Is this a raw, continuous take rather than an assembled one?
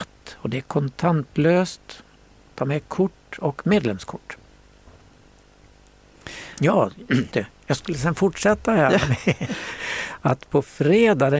no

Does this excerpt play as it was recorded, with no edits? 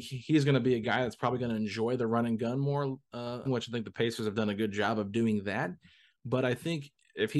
no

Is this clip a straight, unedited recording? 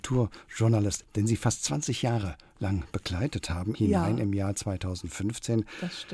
no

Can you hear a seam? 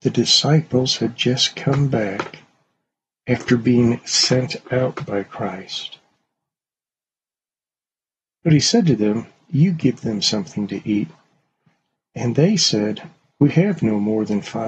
no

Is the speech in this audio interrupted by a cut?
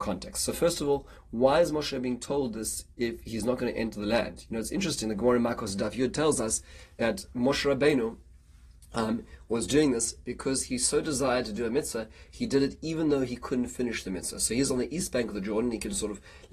no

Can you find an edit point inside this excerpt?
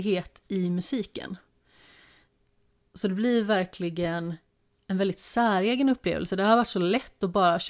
no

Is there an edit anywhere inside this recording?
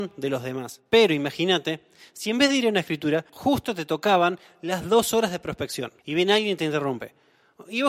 yes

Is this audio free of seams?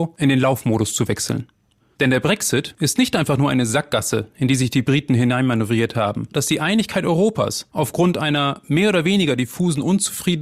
no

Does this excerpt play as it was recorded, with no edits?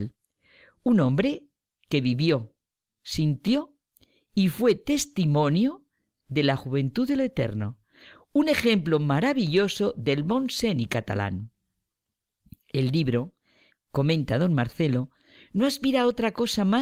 no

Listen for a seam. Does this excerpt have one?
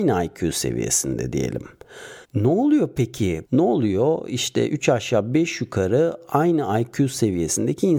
yes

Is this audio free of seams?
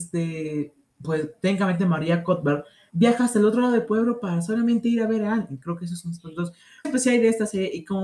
no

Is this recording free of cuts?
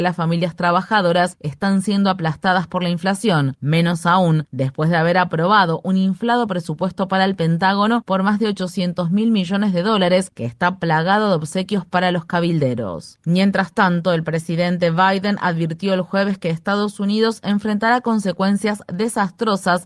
yes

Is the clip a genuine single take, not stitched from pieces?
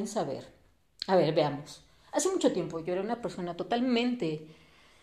yes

